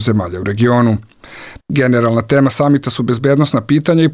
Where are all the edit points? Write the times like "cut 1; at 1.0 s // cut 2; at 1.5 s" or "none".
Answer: cut 1; at 1.6 s